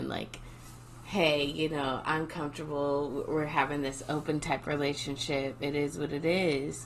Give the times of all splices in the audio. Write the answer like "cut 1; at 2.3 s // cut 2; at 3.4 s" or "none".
none